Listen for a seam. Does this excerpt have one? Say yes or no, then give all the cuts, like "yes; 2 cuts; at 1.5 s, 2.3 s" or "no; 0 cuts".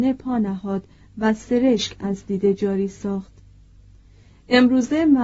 no; 0 cuts